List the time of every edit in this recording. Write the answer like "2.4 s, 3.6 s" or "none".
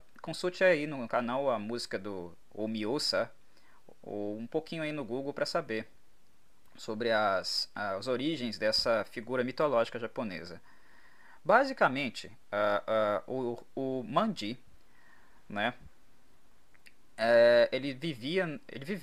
none